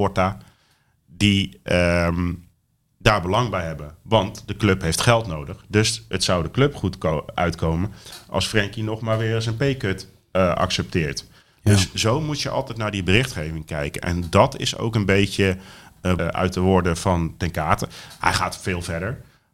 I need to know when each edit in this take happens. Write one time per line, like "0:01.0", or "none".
0:16.2